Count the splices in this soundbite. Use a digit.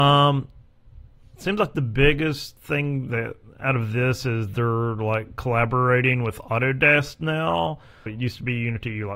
1